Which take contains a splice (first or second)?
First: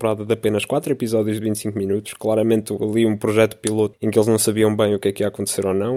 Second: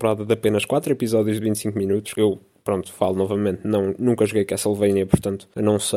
second